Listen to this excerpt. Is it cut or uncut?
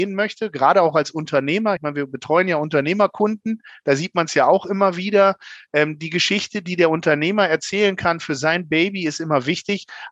uncut